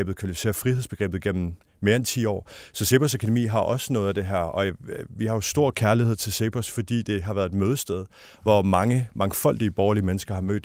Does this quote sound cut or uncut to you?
uncut